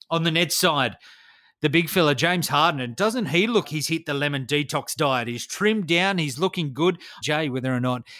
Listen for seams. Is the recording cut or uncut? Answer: cut